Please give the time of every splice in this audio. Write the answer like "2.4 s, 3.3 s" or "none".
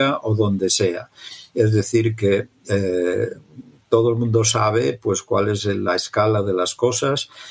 none